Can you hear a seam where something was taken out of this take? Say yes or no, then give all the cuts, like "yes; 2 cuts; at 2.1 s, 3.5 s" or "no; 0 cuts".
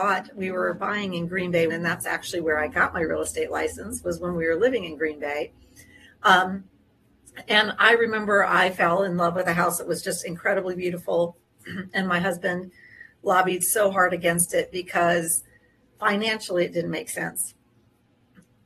yes; 1 cut; at 1.7 s